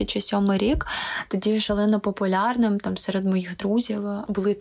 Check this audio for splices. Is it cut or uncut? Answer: uncut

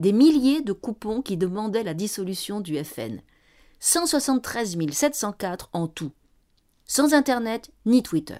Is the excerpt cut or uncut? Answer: uncut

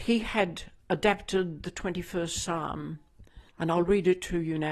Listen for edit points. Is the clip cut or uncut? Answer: cut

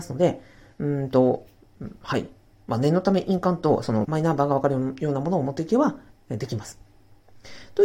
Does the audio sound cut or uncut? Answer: cut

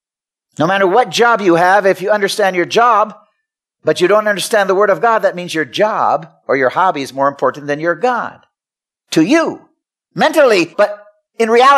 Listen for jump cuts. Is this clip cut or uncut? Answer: cut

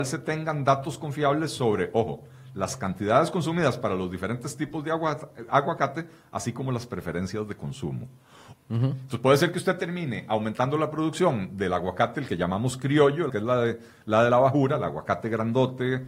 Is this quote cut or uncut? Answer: cut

